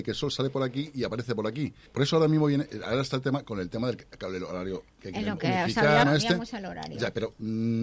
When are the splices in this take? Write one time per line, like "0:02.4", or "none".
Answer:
0:01.9
0:06.0